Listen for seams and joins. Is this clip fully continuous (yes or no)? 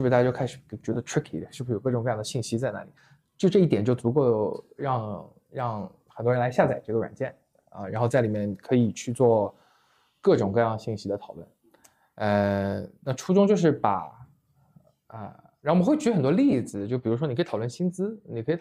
yes